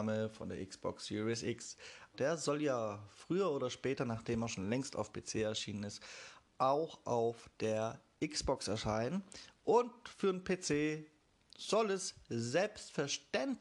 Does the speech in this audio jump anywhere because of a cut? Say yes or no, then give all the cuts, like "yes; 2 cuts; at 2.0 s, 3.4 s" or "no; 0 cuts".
yes; 1 cut; at 2.1 s